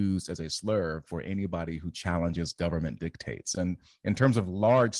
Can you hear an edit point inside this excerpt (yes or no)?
yes